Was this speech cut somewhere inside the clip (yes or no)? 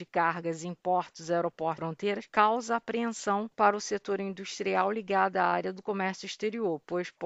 no